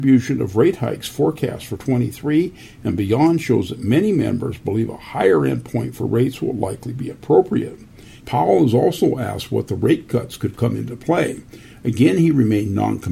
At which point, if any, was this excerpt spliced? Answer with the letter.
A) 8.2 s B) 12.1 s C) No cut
A